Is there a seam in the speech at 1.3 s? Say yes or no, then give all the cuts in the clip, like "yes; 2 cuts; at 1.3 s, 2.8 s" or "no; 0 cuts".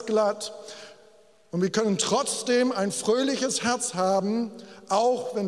no; 0 cuts